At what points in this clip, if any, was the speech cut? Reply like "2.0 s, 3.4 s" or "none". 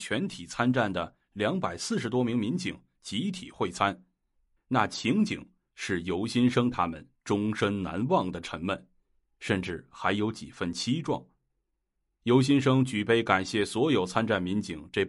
4.6 s